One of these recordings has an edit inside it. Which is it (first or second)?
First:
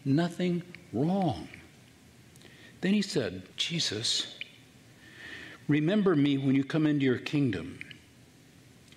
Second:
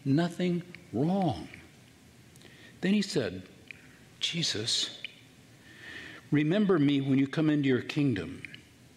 first